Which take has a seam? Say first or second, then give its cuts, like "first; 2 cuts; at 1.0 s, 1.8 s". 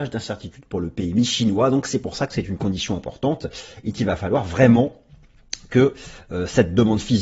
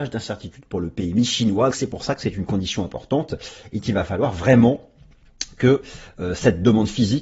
second; 1 cut; at 1.7 s